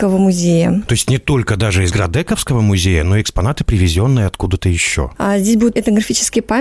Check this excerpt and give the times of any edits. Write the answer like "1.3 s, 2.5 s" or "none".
none